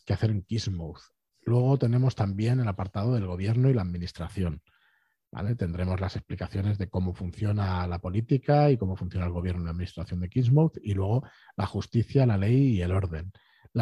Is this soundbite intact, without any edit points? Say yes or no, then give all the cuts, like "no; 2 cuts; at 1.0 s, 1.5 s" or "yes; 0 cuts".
yes; 0 cuts